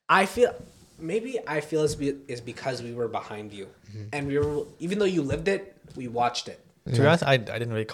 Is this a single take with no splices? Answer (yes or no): no